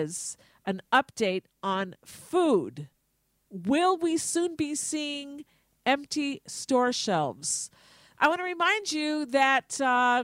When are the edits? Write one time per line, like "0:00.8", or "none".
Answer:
0:08.1